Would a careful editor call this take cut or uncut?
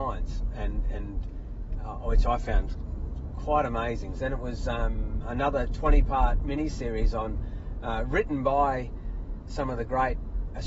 cut